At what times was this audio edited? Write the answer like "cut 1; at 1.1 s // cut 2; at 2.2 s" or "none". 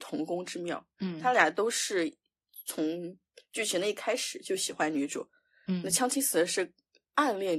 none